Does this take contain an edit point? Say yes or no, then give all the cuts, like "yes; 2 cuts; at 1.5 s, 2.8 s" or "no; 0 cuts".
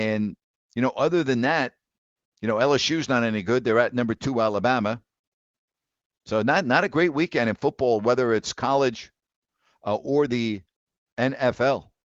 yes; 1 cut; at 6.1 s